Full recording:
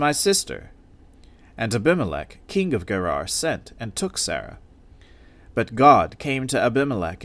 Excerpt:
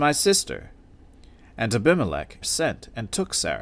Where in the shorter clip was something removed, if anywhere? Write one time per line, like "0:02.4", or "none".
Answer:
0:02.4